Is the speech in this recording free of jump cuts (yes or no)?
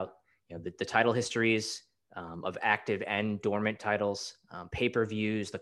yes